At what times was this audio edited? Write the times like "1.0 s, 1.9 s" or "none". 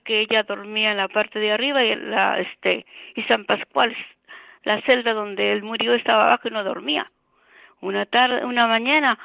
1.9 s